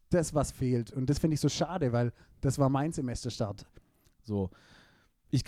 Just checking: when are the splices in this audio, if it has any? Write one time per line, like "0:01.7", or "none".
0:04.2